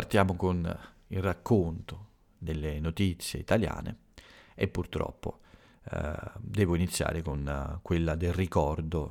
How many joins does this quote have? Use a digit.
0